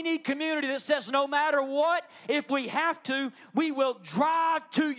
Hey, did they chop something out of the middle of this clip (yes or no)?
no